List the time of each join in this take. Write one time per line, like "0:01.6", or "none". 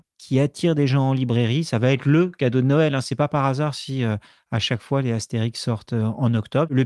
none